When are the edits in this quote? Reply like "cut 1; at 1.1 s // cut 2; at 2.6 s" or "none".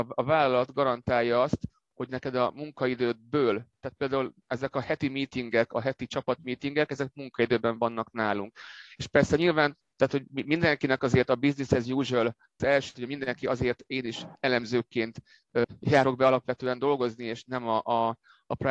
cut 1; at 12.9 s